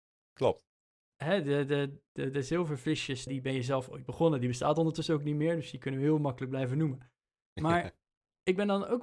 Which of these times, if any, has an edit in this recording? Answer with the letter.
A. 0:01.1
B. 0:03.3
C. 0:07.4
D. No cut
B